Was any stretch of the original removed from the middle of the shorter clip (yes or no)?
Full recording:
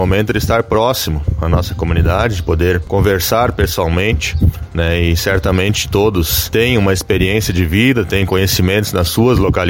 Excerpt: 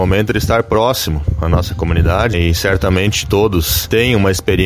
yes